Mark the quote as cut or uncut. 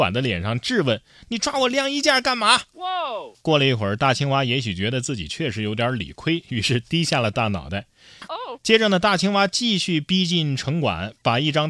cut